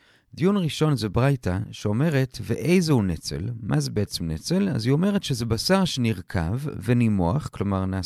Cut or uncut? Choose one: uncut